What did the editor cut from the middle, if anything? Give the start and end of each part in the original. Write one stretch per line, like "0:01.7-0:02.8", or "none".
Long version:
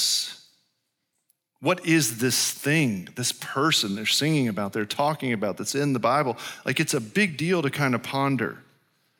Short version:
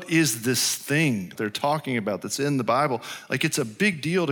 0:03.1-0:04.7